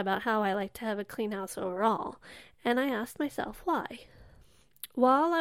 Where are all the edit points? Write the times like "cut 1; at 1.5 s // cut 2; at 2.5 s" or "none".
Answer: none